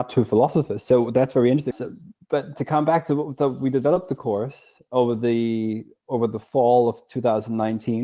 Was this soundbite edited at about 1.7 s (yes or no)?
yes